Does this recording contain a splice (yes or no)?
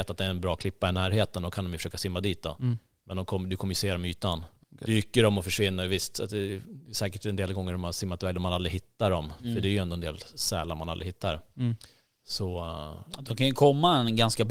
yes